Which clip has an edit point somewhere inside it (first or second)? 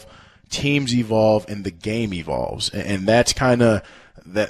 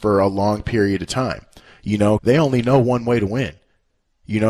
second